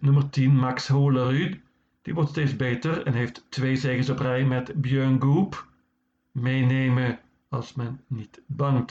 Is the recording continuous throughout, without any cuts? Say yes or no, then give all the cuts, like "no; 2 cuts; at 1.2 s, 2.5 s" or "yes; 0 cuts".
yes; 0 cuts